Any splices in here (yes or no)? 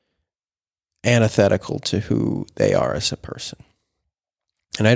no